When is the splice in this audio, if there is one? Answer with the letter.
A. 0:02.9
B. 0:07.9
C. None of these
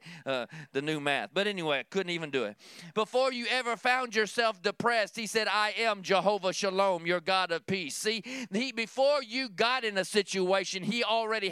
A